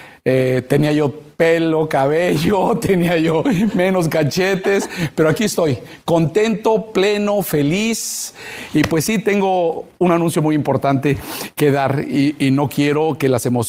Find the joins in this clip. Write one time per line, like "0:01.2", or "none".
none